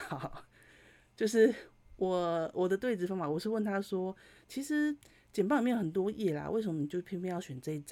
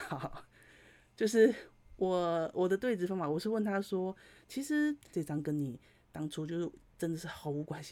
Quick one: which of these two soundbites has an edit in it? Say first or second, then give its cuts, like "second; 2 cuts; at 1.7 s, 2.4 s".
second; 1 cut; at 5.1 s